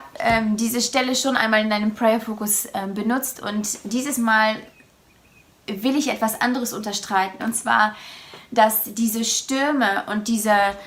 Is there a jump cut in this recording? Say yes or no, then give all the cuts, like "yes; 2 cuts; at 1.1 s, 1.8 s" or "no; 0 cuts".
yes; 1 cut; at 7.4 s